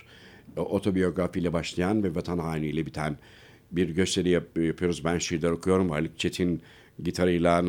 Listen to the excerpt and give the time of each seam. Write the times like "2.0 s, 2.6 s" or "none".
none